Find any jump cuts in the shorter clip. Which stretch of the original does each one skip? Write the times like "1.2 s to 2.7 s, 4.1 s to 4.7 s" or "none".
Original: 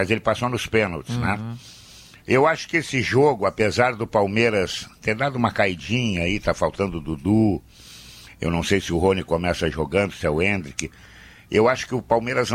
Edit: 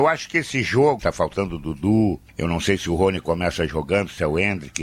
3.4 s to 6.4 s, 7.7 s to 8.3 s